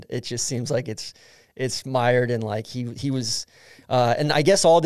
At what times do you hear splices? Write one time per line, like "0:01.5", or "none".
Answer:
none